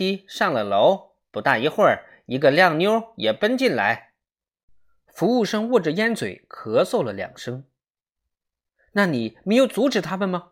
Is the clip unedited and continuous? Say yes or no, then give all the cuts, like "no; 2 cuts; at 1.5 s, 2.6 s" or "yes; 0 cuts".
yes; 0 cuts